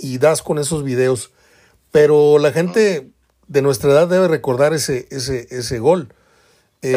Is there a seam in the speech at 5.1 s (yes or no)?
no